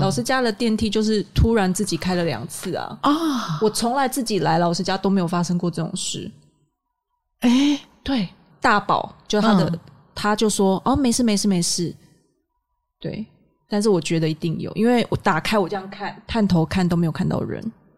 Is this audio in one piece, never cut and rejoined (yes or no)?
no